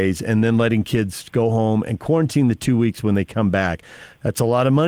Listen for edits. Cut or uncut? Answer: uncut